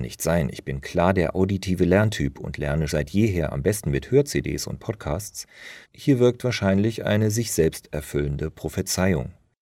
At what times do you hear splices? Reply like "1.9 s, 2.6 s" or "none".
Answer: 2.9 s, 5.8 s

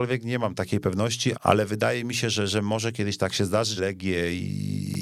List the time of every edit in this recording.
1.3 s, 3.8 s

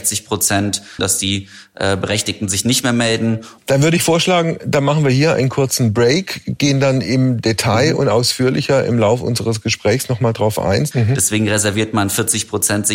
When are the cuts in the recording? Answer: 1.0 s, 3.6 s, 10.9 s

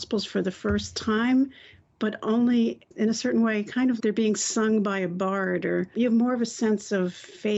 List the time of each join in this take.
4.0 s

